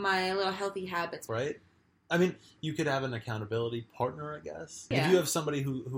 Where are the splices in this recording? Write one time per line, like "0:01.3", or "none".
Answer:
0:01.3
0:04.9